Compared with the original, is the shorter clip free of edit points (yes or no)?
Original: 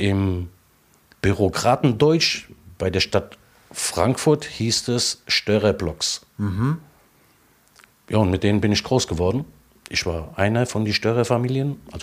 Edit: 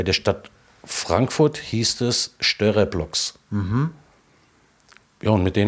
yes